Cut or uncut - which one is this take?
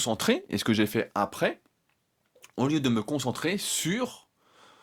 uncut